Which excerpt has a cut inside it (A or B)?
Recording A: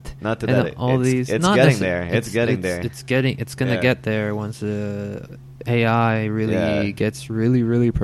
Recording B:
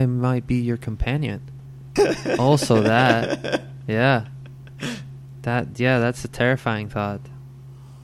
B